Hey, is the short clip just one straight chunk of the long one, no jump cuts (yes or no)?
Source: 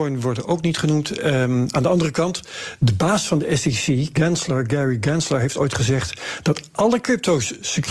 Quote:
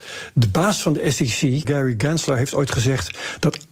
no